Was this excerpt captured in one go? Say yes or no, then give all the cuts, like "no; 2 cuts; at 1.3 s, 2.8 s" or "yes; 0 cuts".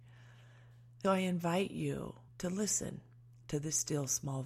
no; 2 cuts; at 1.0 s, 2.3 s